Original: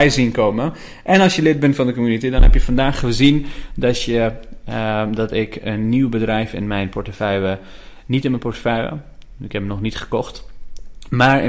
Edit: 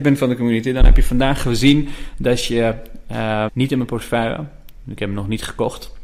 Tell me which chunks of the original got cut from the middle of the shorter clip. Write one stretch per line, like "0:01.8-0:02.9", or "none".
0:05.0-0:08.0